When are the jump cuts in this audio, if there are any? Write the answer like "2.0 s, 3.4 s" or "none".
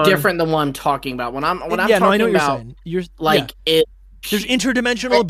none

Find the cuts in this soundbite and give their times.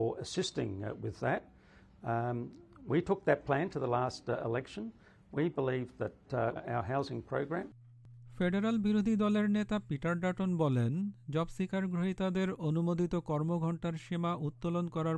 6.6 s

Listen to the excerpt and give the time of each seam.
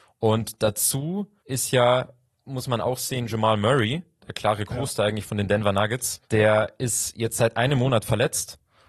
1.4 s, 4.2 s, 6.2 s

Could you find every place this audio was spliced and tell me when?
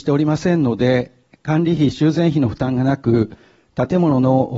none

